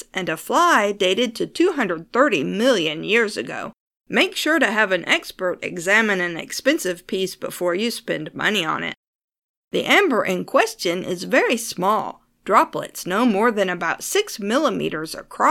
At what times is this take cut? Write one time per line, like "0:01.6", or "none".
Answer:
0:03.9
0:09.6